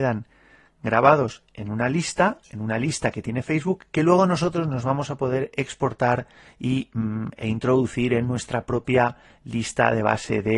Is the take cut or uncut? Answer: uncut